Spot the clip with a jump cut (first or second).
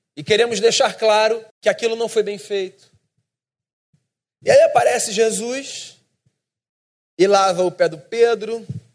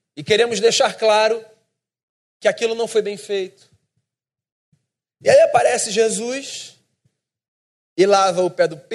first